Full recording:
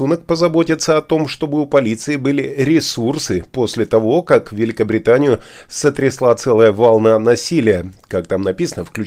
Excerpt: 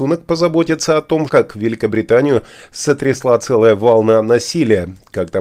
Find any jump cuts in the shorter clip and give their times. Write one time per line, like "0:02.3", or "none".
0:01.3